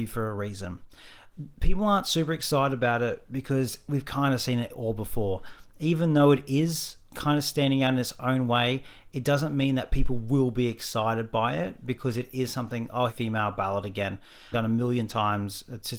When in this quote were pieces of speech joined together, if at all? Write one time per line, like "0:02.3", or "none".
0:13.1
0:14.5

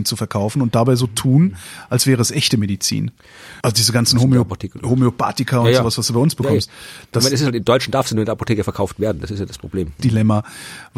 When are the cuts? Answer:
0:03.6
0:10.0

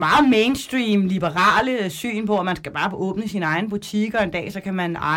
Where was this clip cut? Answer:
none

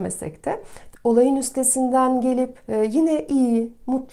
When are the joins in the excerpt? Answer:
0:00.9
0:02.6

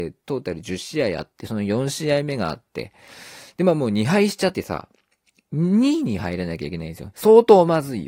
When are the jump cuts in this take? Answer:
0:04.5
0:07.1

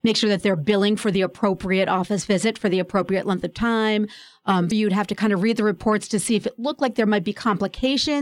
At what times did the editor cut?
0:04.7

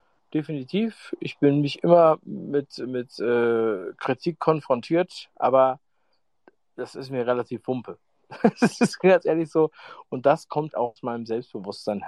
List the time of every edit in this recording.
0:10.7

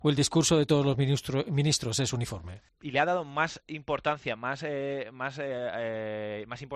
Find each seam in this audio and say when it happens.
0:02.7

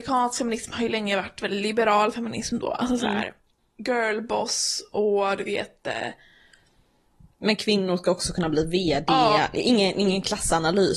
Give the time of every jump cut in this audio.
none

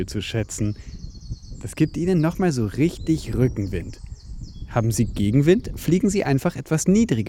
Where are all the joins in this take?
none

